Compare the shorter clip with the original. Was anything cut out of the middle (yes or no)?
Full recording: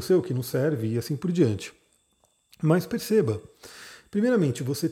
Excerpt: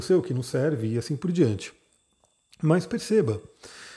no